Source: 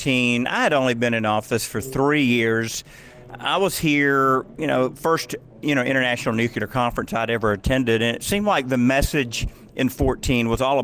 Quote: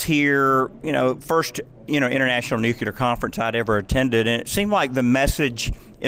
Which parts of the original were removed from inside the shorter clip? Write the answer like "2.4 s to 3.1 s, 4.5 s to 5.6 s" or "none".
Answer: none